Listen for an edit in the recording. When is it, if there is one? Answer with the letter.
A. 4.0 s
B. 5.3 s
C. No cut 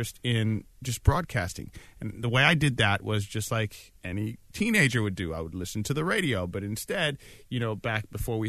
A